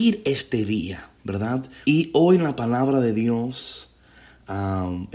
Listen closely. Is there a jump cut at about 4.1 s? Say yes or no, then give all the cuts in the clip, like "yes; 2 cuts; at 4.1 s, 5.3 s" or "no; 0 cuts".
no; 1 cut; at 1.8 s